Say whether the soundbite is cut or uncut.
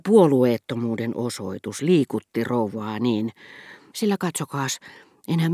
cut